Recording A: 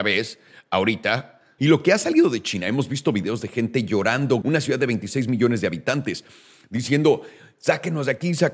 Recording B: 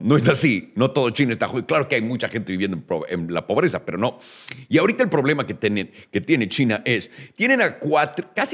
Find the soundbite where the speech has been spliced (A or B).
A